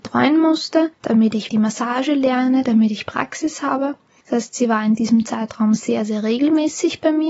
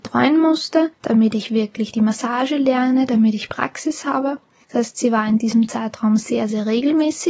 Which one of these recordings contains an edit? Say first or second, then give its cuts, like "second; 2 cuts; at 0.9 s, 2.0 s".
first; 1 cut; at 1.5 s